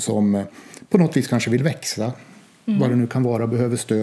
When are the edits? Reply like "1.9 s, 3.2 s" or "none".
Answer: none

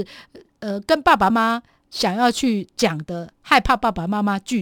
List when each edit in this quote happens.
1.3 s

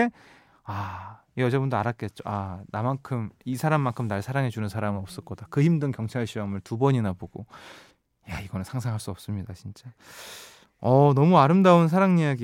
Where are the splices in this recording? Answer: none

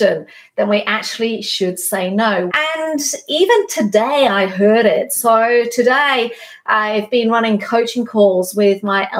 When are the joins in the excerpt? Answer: 2.5 s

